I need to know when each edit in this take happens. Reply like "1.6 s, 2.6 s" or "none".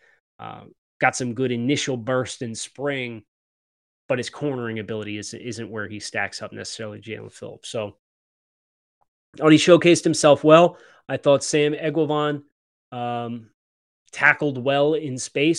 none